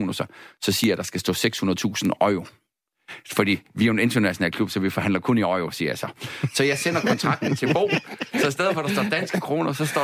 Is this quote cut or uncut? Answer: uncut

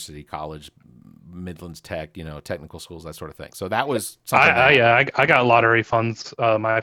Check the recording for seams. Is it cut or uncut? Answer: uncut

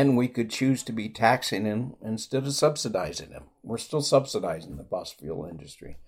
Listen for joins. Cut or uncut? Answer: uncut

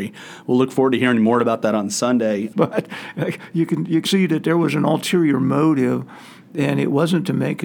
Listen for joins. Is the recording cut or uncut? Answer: cut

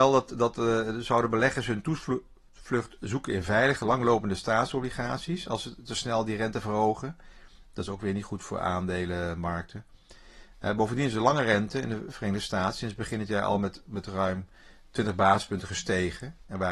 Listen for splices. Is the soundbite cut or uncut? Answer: uncut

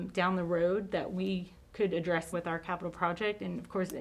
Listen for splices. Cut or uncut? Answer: cut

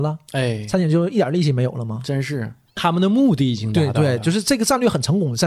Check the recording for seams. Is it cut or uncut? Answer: uncut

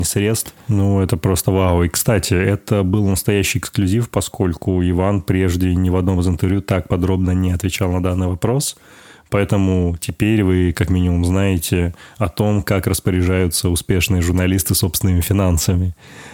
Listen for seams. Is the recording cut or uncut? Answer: uncut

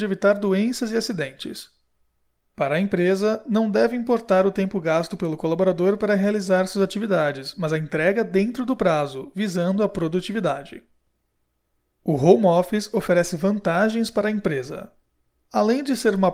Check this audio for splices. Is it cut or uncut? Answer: uncut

